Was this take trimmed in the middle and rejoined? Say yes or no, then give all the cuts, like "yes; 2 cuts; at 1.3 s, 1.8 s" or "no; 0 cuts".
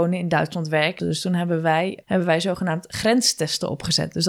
yes; 2 cuts; at 1.0 s, 2.0 s